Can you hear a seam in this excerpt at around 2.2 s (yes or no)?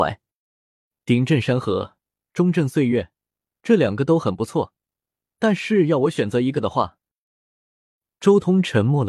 no